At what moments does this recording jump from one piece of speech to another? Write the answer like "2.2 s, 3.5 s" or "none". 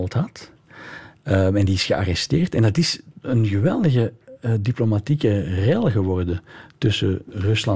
none